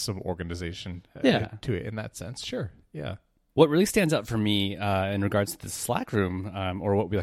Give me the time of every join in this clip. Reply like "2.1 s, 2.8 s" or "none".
3.5 s